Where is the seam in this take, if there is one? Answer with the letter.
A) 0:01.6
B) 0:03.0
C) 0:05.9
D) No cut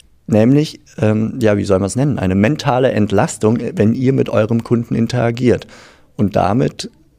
D